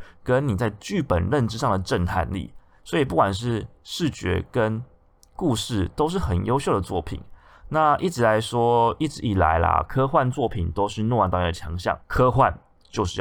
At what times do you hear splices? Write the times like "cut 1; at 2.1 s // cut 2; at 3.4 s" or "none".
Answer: none

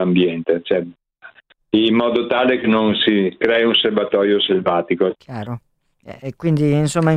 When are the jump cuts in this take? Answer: cut 1; at 5.1 s

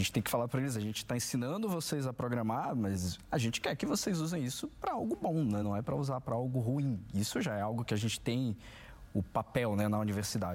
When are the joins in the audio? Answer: none

